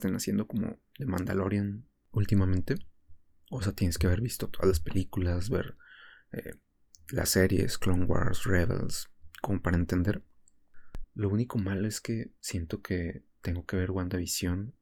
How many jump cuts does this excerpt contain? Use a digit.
2